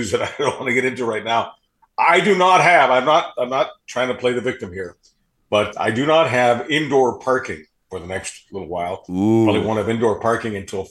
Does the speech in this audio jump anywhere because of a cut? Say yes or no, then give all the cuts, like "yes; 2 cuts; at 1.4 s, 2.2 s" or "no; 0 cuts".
yes; 1 cut; at 5.7 s